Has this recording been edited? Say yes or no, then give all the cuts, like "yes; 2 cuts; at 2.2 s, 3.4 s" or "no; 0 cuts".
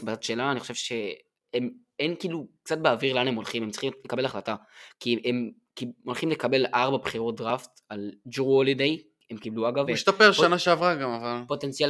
yes; 1 cut; at 9.9 s